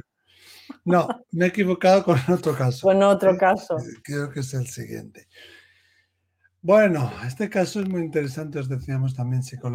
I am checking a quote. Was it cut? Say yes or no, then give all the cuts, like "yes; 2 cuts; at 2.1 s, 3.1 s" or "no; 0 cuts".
no; 0 cuts